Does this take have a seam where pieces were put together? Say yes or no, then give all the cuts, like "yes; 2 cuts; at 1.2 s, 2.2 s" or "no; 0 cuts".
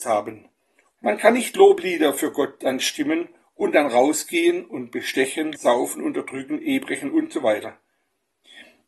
yes; 2 cuts; at 1.0 s, 5.5 s